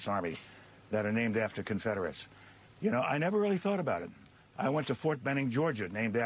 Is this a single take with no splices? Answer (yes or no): yes